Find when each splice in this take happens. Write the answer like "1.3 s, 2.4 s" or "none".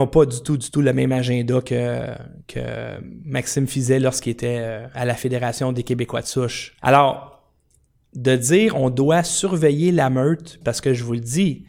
6.8 s, 10.6 s